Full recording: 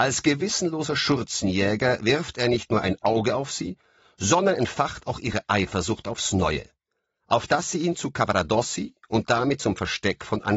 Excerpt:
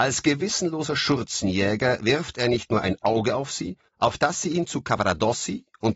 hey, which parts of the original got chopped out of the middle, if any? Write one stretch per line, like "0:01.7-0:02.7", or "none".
0:03.9-0:07.2